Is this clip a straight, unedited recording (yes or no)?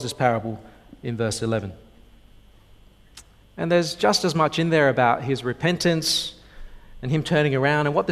no